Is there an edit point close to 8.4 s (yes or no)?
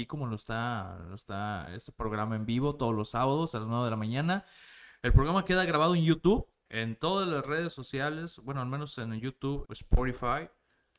no